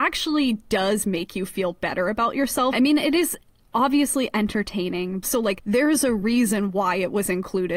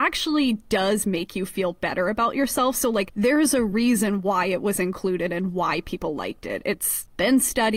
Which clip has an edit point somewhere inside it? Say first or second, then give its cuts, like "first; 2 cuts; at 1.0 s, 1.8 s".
first; 2 cuts; at 2.7 s, 5.2 s